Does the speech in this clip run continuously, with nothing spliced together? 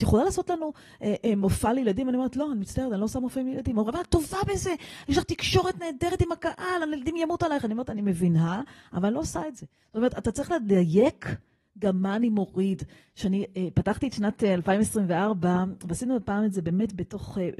yes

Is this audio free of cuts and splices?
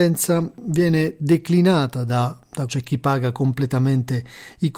no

